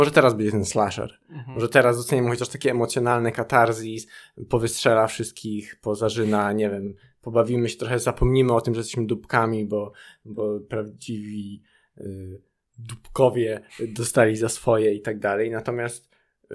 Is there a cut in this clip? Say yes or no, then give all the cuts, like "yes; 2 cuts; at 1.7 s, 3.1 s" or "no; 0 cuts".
no; 0 cuts